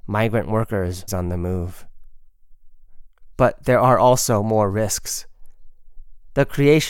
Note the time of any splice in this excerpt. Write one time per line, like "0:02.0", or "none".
0:01.1
0:03.3